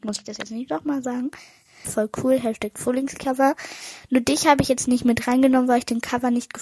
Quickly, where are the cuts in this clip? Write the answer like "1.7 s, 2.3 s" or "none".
1.8 s